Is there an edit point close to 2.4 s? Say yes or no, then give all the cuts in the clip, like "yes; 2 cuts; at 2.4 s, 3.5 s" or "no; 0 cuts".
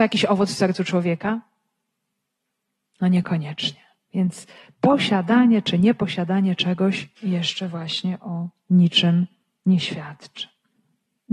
no; 2 cuts; at 4.1 s, 7.2 s